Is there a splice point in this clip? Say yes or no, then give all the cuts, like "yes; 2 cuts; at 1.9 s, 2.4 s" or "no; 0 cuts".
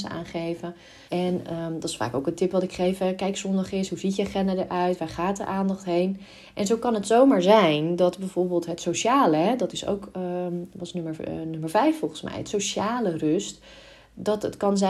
yes; 1 cut; at 1.1 s